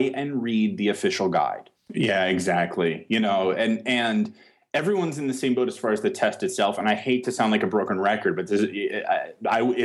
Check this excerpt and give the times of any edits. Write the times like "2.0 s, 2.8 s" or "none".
1.7 s